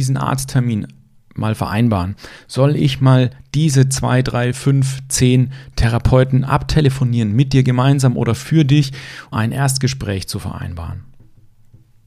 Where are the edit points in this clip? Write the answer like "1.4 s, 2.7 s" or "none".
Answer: 9.3 s